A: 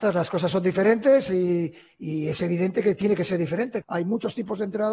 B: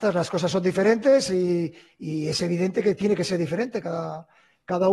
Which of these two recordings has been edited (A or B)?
A